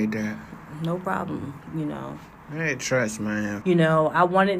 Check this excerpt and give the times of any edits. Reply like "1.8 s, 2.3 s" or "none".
3.6 s